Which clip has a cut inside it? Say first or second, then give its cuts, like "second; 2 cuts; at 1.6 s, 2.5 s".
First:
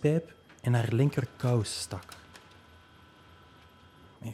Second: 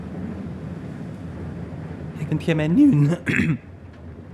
second; 1 cut; at 2.3 s